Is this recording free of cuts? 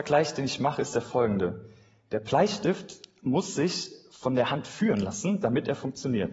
yes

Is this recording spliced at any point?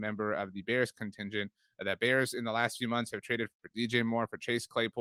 no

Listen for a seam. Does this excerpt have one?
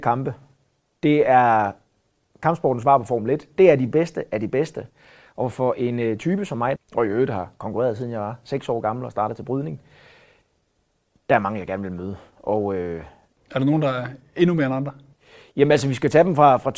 yes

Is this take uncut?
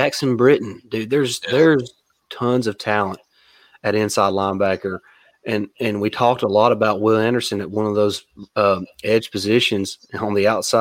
yes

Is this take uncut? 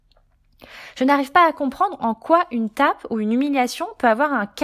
yes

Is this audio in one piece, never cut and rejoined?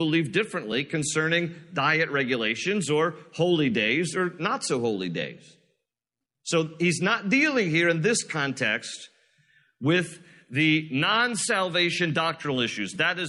yes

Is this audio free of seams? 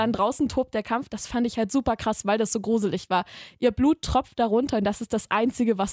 yes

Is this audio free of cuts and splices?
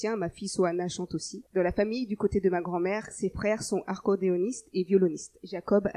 no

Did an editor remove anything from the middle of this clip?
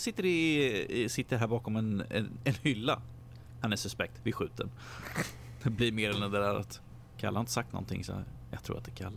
no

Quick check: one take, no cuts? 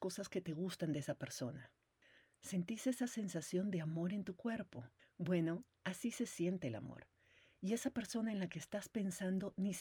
no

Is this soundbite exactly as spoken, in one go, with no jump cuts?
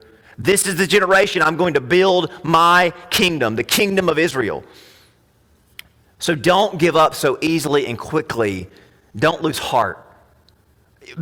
yes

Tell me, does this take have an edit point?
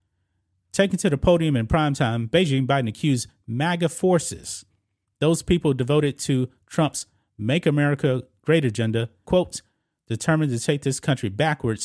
yes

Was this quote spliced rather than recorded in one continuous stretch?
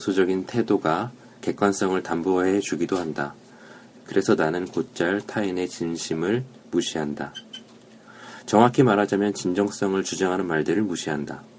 yes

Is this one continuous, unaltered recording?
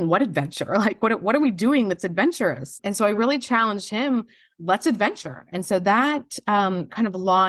yes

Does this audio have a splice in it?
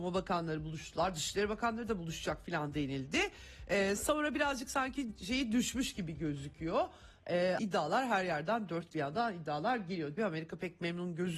yes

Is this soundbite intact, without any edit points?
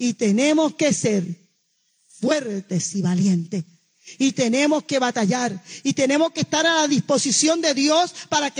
yes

